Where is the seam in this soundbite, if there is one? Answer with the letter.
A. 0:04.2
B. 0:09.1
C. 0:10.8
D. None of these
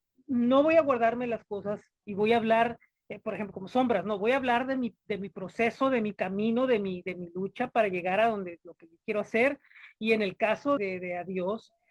C